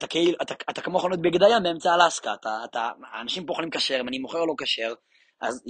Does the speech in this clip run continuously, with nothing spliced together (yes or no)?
yes